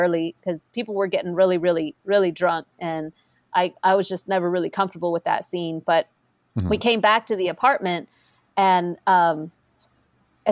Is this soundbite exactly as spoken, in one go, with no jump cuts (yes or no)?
yes